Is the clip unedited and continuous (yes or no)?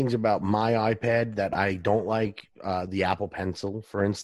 yes